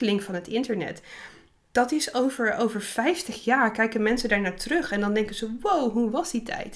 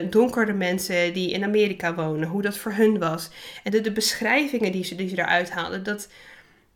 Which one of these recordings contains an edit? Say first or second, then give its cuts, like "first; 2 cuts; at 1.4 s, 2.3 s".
second; 1 cut; at 3.7 s